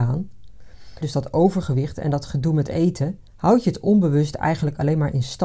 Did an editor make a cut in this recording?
yes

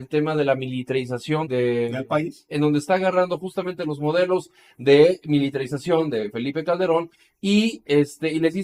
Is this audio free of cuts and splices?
no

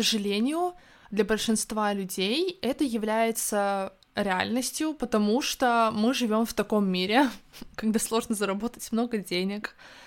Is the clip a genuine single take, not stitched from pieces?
yes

